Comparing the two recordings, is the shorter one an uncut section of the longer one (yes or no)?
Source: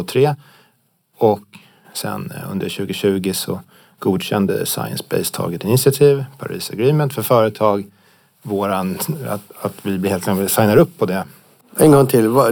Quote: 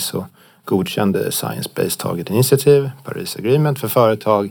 yes